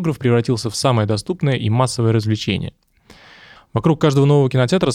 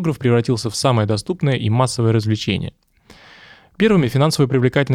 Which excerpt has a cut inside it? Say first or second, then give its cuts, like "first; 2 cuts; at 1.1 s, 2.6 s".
first; 1 cut; at 3.6 s